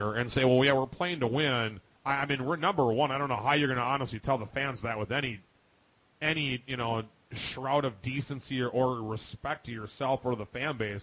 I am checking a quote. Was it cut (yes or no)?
yes